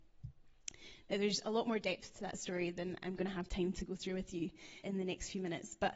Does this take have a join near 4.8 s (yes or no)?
yes